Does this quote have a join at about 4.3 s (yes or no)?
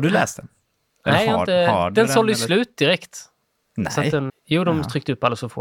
yes